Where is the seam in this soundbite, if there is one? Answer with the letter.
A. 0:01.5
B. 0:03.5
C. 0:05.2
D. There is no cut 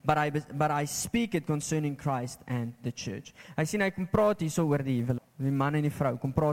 C